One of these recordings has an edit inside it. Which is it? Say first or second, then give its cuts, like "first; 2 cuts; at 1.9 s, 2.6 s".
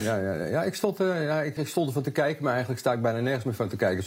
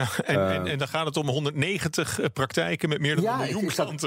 first; 1 cut; at 1.6 s